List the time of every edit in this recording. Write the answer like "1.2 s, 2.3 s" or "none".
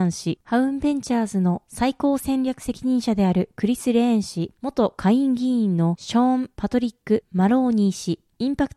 none

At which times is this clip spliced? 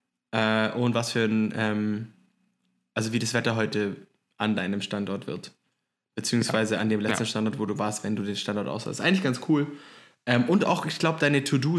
none

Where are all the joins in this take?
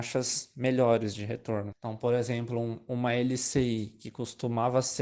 1.7 s

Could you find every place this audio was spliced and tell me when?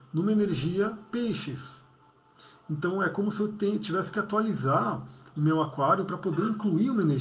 none

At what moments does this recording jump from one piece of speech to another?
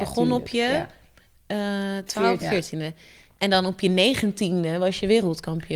2.4 s

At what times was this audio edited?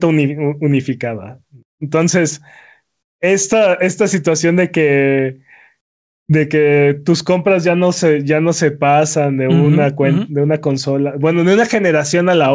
none

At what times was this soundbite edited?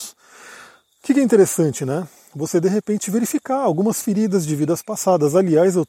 none

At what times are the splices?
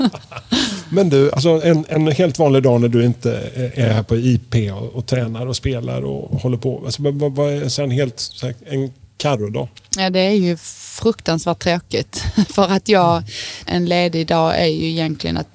13.7 s

